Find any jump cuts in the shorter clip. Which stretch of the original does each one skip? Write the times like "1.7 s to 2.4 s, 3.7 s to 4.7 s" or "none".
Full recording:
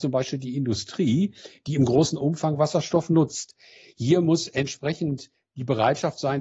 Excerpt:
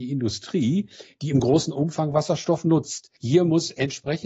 3.6 s to 3.9 s

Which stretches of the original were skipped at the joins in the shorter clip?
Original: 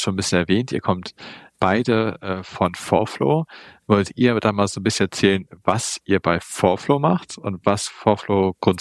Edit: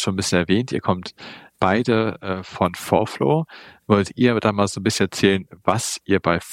none

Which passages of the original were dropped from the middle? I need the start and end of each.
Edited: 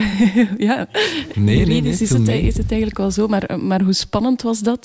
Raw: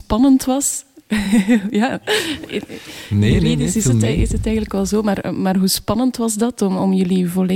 2.5 s to 3.1 s

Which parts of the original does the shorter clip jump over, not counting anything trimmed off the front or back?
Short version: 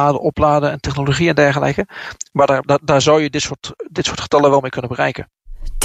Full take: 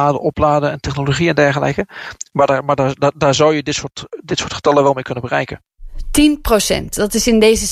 2.6 s to 3.0 s

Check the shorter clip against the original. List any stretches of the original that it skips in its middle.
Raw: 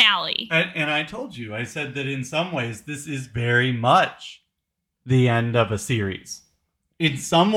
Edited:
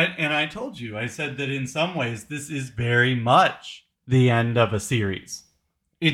4.5 s to 4.9 s

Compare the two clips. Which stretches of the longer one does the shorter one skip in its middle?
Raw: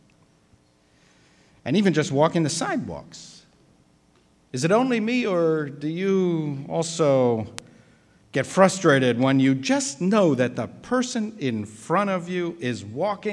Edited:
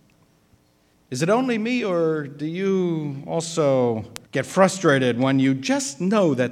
0.9 s to 4.3 s, 7.7 s to 8.3 s

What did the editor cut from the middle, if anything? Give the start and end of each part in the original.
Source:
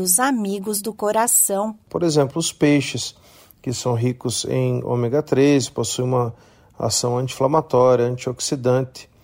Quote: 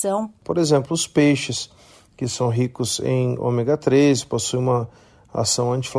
none

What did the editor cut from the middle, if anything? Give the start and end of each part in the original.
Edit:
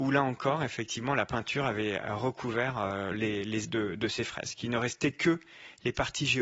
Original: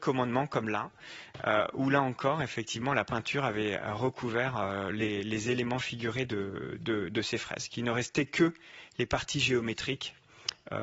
5.4 s to 6.8 s

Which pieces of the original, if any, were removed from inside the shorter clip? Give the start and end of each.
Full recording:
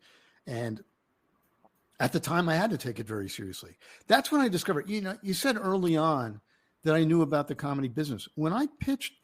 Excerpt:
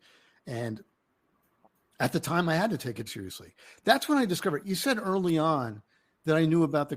3.1 s to 3.3 s, 4.8 s to 5.2 s

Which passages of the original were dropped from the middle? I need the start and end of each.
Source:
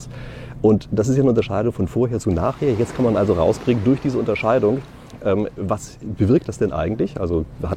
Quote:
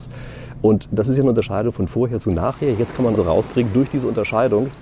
3.1 s to 3.3 s

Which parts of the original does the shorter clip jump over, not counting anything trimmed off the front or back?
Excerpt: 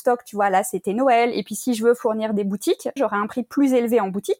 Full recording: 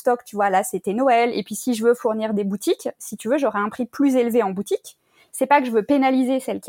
3.0 s to 3.4 s

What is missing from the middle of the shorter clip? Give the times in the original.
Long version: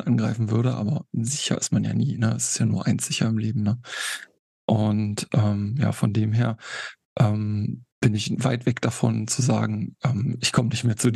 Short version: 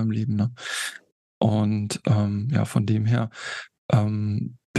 none

